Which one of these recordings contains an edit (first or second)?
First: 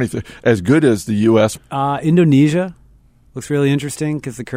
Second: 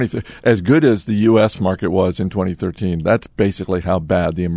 first